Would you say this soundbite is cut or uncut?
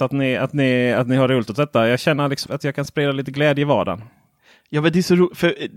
cut